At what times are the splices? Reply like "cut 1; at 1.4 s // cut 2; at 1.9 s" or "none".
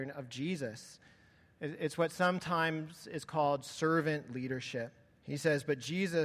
cut 1; at 5.2 s